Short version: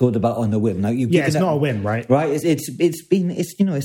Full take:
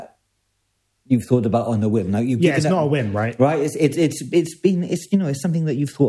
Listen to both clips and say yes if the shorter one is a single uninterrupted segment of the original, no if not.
no